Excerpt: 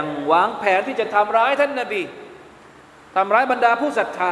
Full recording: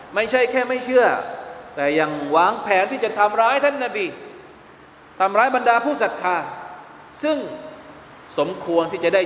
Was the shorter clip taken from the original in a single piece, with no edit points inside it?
yes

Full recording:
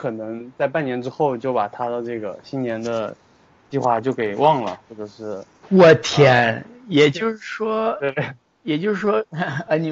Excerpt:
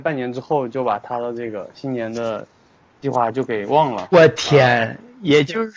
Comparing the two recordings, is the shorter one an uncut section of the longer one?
no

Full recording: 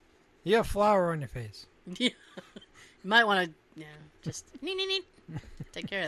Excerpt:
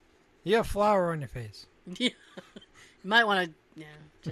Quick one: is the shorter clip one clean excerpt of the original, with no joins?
yes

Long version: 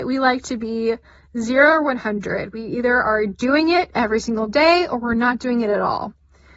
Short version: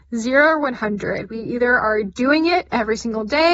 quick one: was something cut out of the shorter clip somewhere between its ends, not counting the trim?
no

